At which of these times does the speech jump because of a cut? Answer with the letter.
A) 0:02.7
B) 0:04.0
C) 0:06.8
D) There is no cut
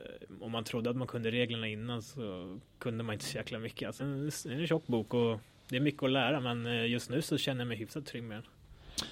B